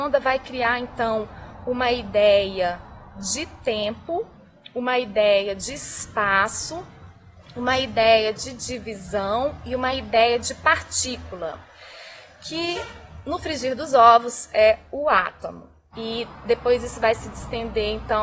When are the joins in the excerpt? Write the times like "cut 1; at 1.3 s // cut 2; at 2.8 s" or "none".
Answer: cut 1; at 15.9 s